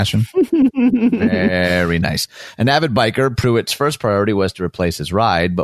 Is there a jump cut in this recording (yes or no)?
no